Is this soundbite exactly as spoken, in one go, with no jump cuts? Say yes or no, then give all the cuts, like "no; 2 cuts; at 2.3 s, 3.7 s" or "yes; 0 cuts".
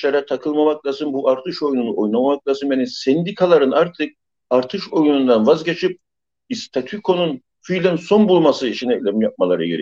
yes; 0 cuts